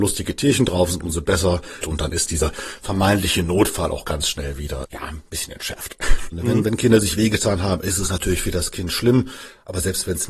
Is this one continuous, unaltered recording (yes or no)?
no